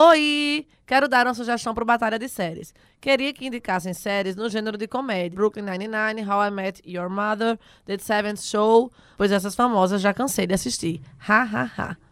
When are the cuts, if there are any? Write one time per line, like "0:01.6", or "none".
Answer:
0:05.3
0:09.2